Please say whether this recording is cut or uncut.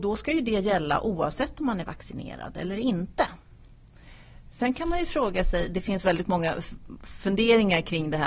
uncut